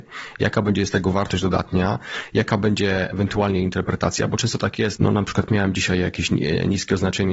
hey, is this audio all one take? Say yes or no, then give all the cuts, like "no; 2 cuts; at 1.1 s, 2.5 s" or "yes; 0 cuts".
no; 1 cut; at 5.0 s